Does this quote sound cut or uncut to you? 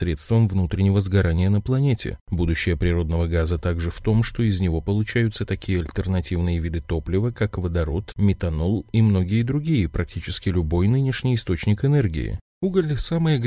cut